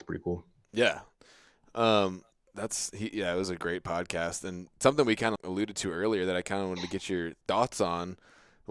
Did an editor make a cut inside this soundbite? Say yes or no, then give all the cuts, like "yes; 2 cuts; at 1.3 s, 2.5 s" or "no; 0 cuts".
yes; 2 cuts; at 2.3 s, 5.4 s